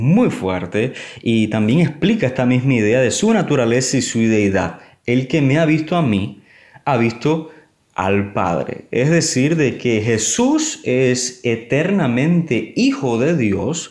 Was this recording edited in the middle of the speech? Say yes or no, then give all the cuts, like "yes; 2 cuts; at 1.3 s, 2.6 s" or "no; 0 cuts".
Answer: no; 0 cuts